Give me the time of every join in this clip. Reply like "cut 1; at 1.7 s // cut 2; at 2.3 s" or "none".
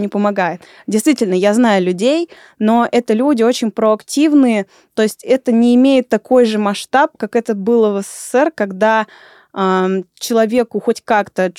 none